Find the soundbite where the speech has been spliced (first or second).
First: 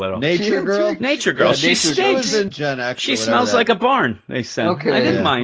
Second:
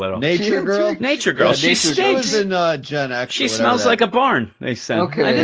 first